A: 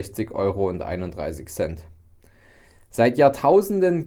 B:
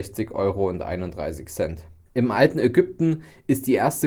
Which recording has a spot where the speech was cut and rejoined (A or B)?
B